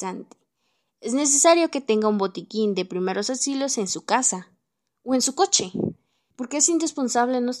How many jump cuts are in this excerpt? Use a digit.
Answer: 1